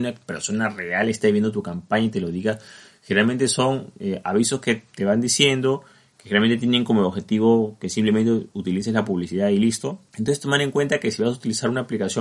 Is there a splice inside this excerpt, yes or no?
no